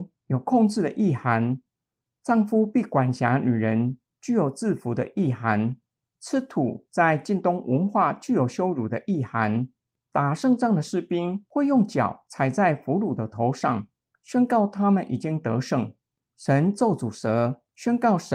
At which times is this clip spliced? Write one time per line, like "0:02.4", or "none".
0:06.0